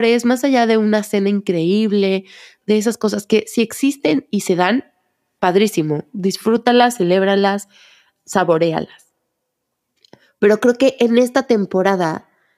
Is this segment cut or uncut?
cut